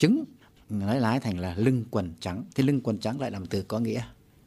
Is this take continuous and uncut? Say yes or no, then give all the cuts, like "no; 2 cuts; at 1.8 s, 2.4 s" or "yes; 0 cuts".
no; 1 cut; at 2.5 s